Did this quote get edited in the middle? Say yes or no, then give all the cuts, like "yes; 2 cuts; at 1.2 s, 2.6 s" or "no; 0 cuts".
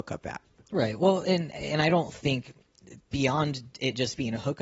no; 0 cuts